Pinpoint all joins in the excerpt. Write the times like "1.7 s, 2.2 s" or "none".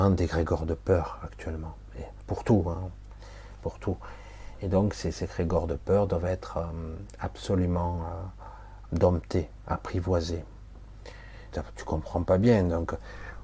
8.9 s, 11.5 s